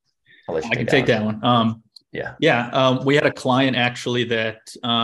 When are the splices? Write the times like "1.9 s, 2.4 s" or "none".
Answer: none